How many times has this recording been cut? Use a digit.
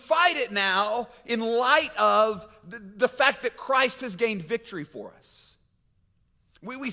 0